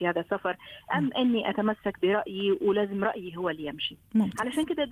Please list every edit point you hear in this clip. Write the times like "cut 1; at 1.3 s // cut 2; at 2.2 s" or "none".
none